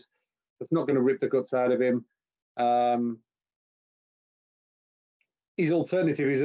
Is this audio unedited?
yes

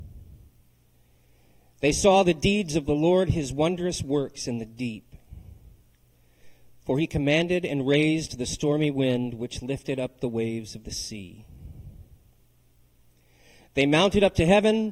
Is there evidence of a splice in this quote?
no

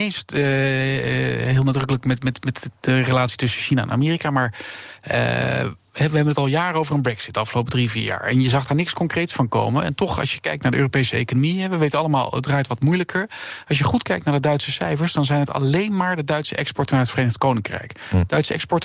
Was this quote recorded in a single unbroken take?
yes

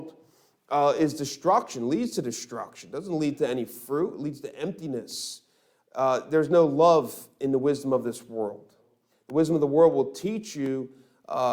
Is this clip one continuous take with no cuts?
no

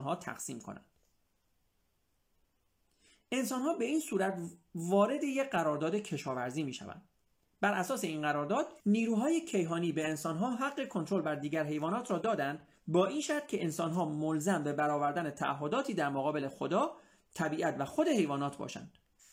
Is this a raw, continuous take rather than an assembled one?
no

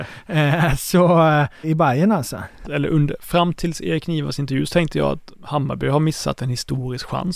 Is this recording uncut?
no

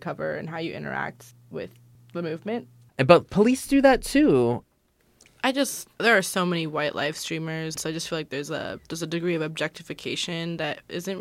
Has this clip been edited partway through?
yes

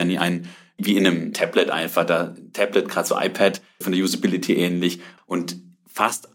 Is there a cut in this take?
yes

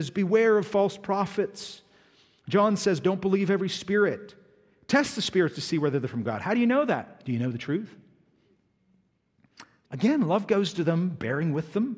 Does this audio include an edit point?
yes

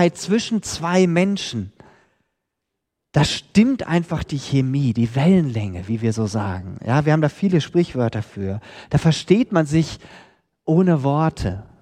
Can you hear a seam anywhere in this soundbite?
no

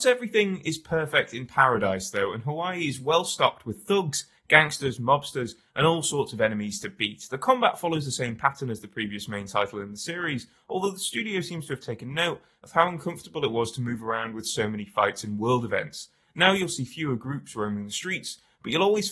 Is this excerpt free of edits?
yes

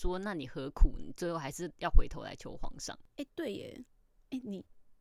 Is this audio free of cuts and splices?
yes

